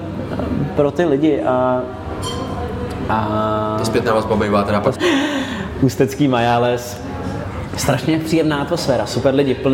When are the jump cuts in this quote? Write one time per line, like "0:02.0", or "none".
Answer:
0:05.0